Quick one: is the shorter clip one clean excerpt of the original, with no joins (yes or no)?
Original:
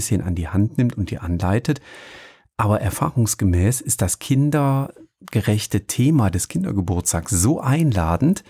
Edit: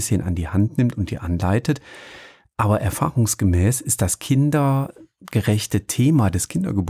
yes